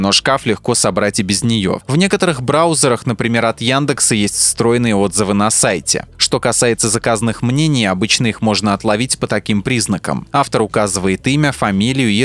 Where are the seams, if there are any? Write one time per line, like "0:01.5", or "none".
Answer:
0:01.8